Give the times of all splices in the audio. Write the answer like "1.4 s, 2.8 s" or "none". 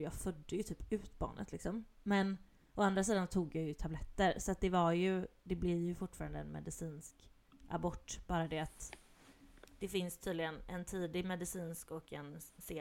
none